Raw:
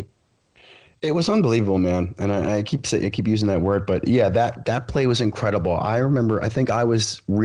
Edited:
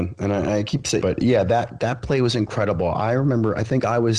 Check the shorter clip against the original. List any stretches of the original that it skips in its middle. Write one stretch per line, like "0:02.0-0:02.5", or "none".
0:03.0-0:03.9

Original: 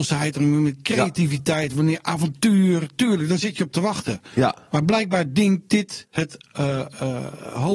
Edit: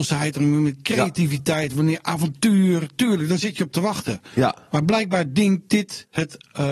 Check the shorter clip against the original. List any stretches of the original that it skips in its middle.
none

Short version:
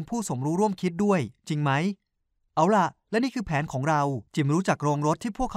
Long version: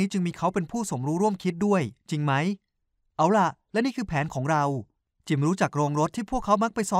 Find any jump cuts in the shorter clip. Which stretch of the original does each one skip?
0:04.9-0:05.2

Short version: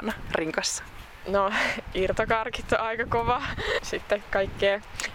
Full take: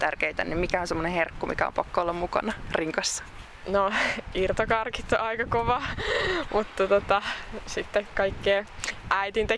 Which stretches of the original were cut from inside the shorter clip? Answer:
0:06.2-0:07.6

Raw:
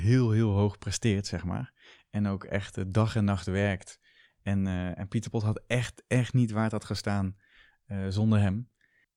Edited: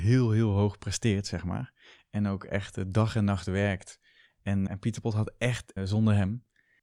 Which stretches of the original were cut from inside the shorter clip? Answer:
0:04.7-0:05.0
0:06.1-0:08.0

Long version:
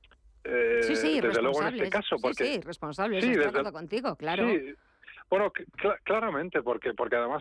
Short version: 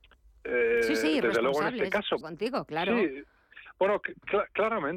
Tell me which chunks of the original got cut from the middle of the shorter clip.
0:02.2-0:03.7

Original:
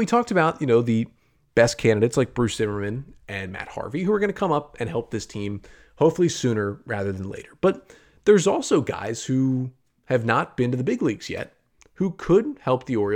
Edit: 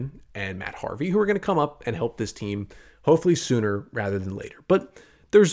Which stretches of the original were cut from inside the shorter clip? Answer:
none

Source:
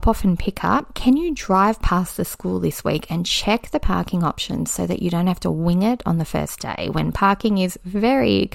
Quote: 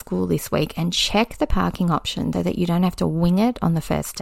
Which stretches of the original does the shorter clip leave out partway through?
0:04.7-0:04.8

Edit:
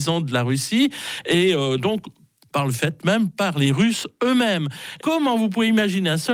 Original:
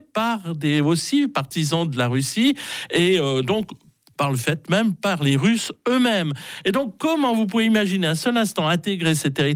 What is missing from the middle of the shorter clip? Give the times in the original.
0:06.6-0:07.0

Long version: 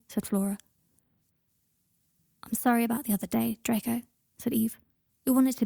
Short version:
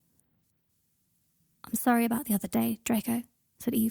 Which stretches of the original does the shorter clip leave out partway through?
none

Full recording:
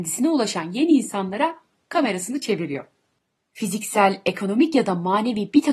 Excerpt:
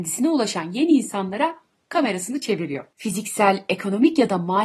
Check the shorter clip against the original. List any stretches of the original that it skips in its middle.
0:02.9-0:03.5

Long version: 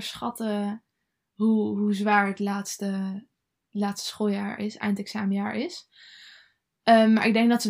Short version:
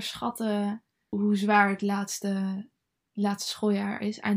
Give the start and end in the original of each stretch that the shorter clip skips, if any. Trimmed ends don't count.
0:01.1-0:01.7

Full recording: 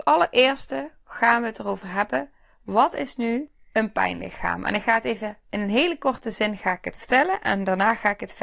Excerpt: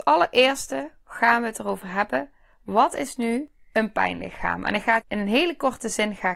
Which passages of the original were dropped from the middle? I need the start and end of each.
0:05.0-0:05.4

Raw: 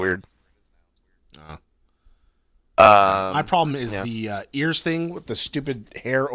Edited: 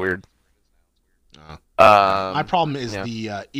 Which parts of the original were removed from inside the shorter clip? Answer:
0:01.6-0:02.6

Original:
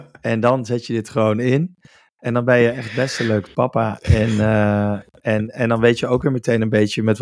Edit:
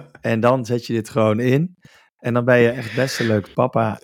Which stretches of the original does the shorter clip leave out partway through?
none

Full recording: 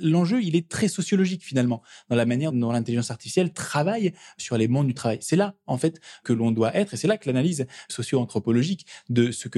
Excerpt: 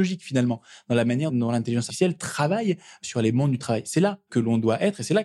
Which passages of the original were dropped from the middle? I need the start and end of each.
0:03.1-0:03.2
0:05.6-0:06.2

